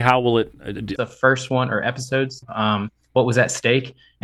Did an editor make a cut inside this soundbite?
yes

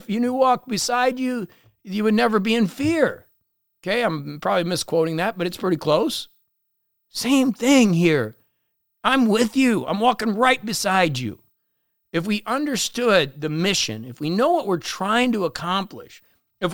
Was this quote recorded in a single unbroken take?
yes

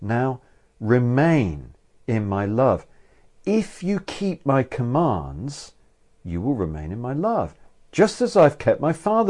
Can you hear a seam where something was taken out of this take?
no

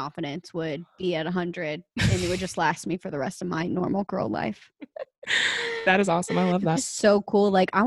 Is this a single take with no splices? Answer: no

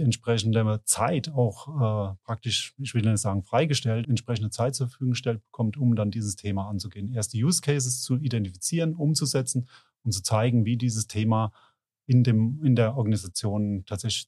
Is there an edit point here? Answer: yes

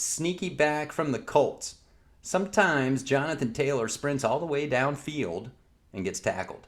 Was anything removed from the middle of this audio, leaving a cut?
no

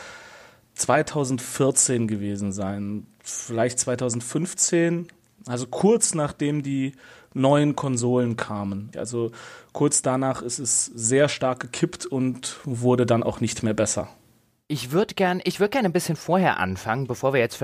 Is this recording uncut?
no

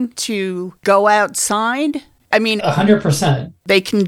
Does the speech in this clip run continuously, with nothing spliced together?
no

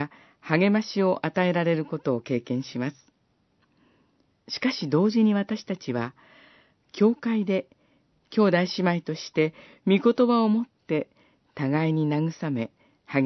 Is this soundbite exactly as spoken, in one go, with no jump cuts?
yes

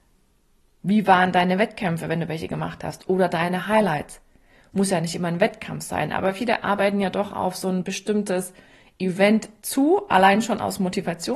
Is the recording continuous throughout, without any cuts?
yes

